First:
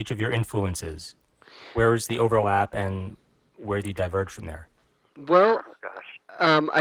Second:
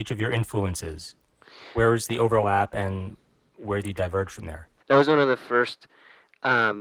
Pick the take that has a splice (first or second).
second